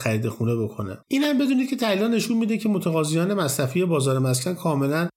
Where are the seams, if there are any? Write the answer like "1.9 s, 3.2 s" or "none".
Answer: 1.0 s